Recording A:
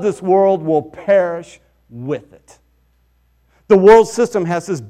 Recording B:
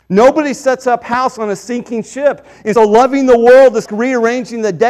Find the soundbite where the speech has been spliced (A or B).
B